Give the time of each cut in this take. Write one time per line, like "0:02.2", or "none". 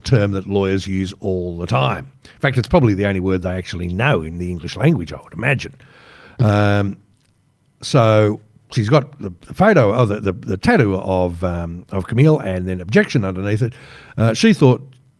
none